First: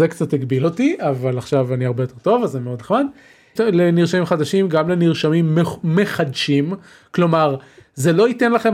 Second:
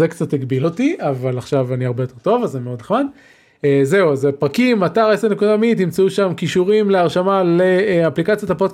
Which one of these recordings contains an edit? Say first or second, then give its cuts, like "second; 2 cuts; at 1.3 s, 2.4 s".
first; 1 cut; at 3.6 s